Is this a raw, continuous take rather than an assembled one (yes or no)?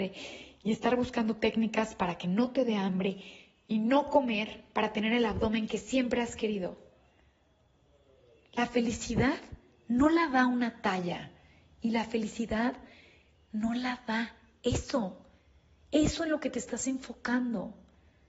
yes